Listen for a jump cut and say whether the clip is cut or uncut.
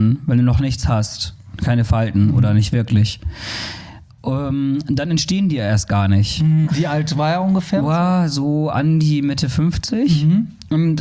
cut